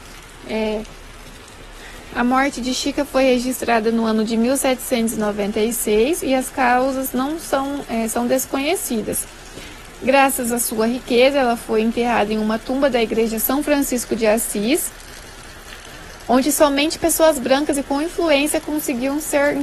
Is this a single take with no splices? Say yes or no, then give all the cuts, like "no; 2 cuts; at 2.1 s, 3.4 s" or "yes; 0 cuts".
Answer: yes; 0 cuts